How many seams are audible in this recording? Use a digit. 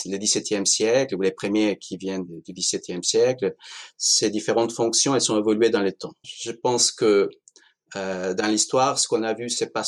1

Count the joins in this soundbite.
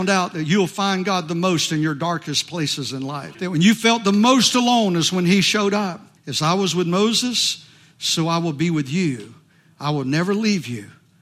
2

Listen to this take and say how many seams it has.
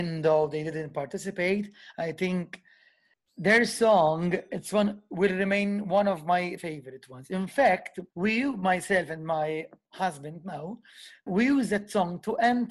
3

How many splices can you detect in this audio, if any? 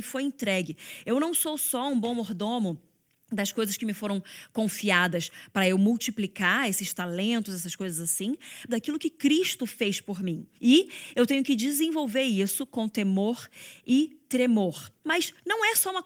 3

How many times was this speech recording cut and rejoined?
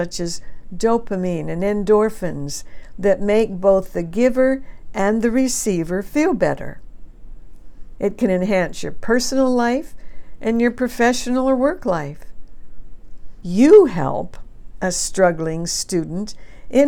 2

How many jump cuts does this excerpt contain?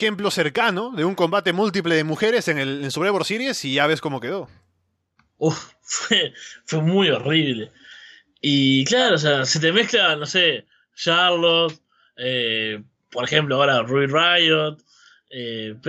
0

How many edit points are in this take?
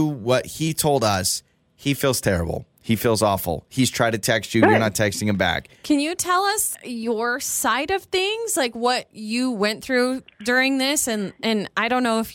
1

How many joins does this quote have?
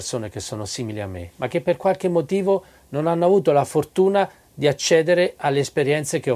0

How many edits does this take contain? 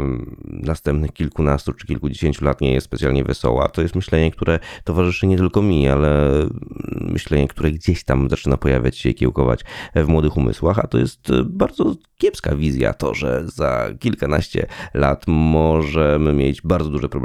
0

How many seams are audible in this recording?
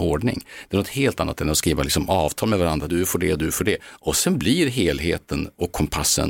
1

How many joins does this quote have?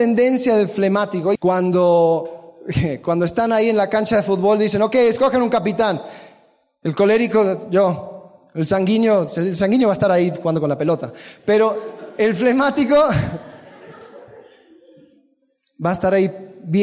1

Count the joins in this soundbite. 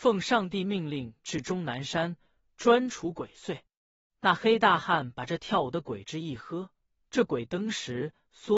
1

